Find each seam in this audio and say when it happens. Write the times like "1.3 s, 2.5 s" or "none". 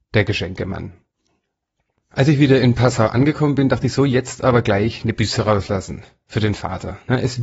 none